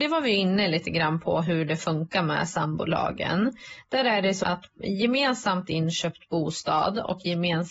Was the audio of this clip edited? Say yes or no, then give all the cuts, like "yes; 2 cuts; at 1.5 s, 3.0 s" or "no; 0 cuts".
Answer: yes; 1 cut; at 4.4 s